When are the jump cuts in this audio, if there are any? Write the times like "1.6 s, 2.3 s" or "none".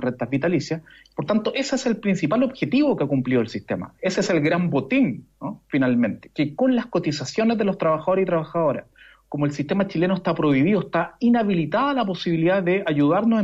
none